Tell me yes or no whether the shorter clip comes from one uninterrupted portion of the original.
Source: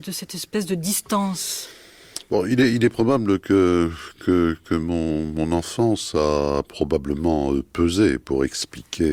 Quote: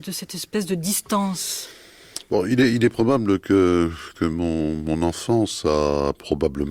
no